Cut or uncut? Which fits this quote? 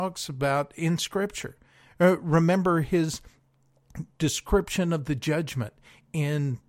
uncut